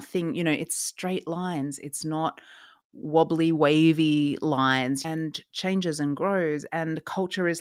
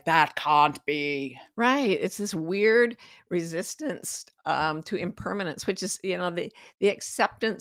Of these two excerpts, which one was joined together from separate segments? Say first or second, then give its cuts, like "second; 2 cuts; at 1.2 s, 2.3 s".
first; 1 cut; at 5.0 s